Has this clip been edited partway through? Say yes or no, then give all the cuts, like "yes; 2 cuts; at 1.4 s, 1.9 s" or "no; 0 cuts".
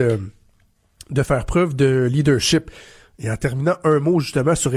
no; 0 cuts